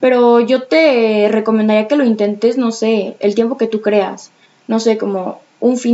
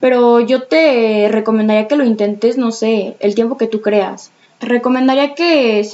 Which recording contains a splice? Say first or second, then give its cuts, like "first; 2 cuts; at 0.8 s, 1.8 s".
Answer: second; 1 cut; at 4.5 s